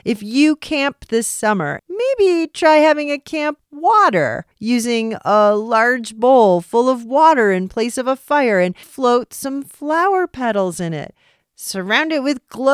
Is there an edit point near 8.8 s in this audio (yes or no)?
yes